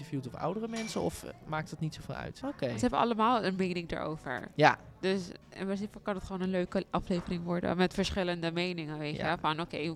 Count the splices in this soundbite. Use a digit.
1